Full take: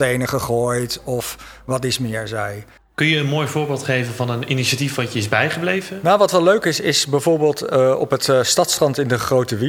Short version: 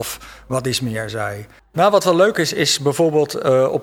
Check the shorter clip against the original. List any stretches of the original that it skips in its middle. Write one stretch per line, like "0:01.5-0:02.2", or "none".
0:02.9-0:06.0